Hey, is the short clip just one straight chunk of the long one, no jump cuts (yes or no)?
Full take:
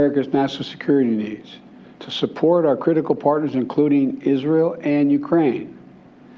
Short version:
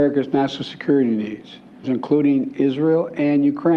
no